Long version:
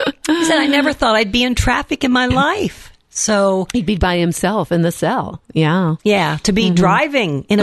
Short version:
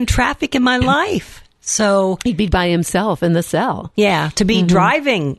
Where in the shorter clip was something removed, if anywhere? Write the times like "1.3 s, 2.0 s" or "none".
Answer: 3.9 s